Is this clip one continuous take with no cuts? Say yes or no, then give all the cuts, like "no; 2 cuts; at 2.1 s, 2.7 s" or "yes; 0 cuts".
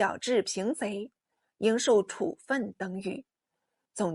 yes; 0 cuts